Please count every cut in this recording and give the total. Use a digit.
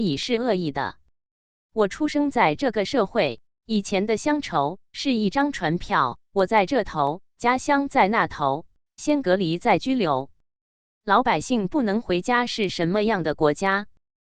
2